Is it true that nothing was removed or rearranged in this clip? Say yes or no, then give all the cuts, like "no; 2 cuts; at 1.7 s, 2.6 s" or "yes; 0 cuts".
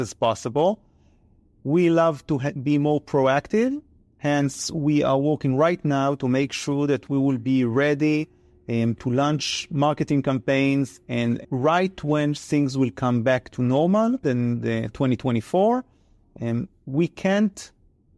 no; 2 cuts; at 11.4 s, 14.2 s